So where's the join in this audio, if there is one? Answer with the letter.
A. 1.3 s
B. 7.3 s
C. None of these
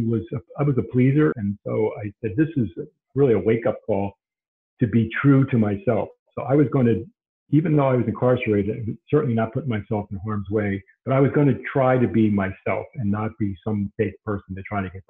A